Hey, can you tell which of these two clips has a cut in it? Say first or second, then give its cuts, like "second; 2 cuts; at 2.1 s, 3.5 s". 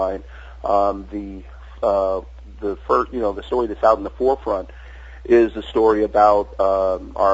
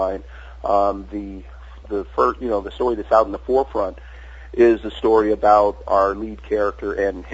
second; 2 cuts; at 1.8 s, 5.8 s